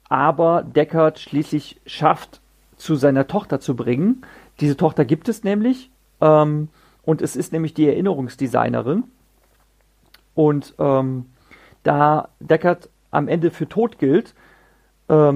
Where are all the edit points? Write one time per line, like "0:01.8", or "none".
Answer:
none